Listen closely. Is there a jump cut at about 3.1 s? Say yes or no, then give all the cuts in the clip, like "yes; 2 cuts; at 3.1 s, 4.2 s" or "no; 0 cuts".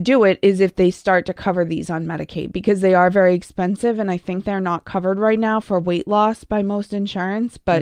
no; 0 cuts